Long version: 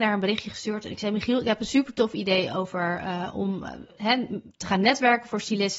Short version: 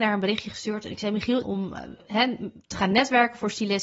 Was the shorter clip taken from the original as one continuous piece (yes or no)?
no